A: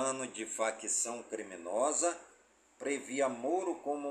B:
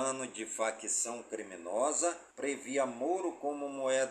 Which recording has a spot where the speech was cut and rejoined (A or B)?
B